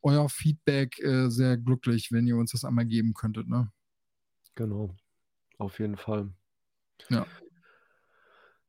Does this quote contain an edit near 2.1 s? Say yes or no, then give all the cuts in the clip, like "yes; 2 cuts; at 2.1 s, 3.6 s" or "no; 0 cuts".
yes; 1 cut; at 2.1 s